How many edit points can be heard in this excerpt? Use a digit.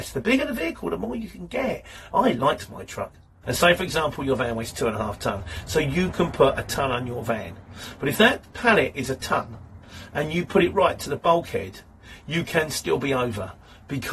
2